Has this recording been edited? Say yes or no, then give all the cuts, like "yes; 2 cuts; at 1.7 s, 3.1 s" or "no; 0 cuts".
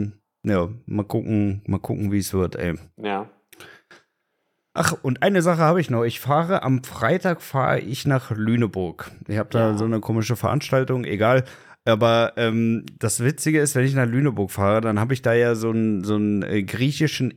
no; 0 cuts